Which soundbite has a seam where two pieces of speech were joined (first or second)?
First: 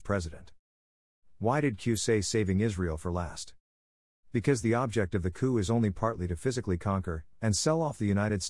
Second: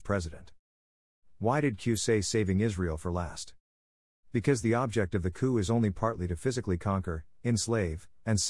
first